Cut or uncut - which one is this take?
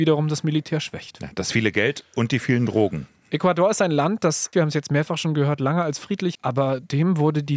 cut